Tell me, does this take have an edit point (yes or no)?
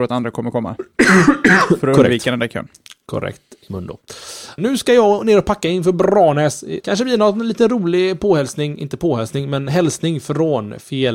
yes